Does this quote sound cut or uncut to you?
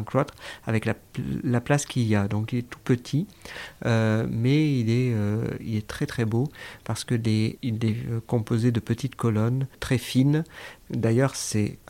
cut